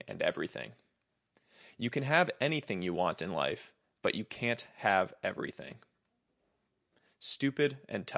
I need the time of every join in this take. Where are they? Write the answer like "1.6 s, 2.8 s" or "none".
none